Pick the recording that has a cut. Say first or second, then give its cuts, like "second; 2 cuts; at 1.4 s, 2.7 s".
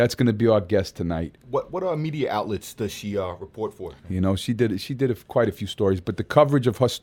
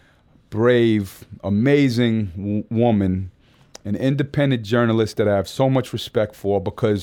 first; 1 cut; at 4.0 s